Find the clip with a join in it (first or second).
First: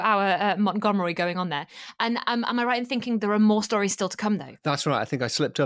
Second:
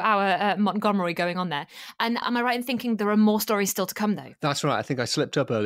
second